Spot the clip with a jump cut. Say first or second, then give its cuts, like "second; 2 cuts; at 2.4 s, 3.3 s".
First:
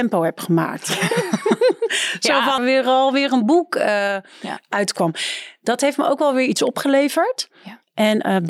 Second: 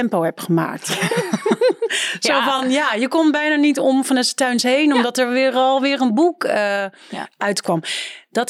first; 1 cut; at 2.6 s